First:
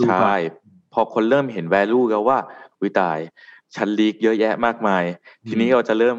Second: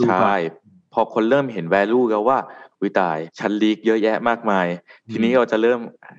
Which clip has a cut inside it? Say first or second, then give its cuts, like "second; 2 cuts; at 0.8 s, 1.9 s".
second; 1 cut; at 3.3 s